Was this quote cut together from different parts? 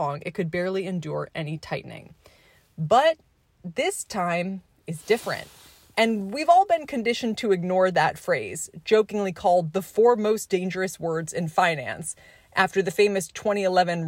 no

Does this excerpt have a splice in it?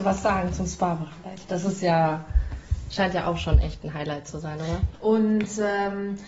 yes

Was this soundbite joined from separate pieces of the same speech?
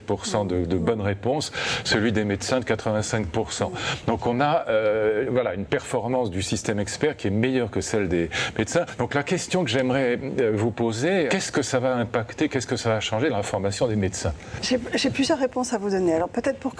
no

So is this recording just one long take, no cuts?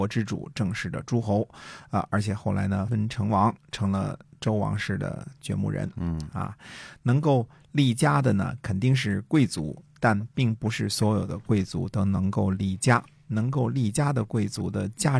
no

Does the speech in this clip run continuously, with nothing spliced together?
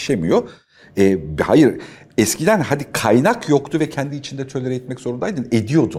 yes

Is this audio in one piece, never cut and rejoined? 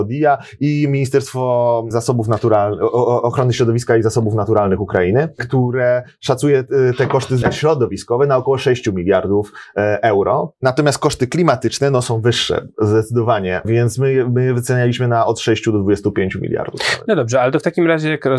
yes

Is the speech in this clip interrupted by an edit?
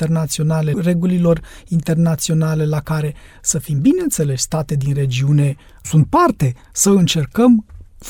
yes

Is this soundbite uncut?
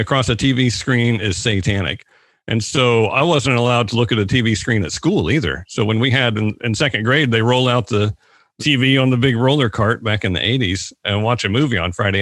yes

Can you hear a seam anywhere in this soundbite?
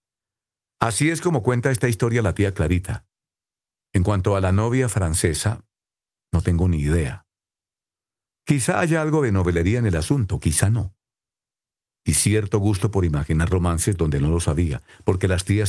no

